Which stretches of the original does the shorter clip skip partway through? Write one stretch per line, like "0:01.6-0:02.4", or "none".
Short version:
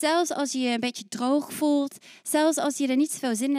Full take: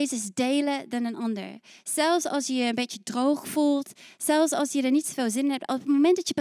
none